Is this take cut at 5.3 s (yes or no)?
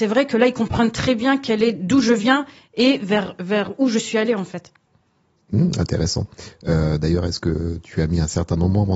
no